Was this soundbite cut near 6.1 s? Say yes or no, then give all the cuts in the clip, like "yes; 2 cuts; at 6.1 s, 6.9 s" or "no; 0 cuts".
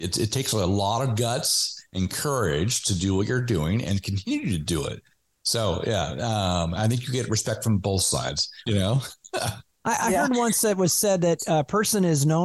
no; 1 cut; at 8.7 s